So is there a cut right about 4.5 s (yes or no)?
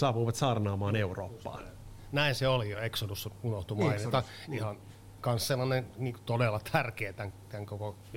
no